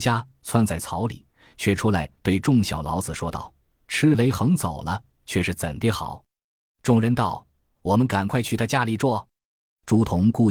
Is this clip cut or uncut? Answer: uncut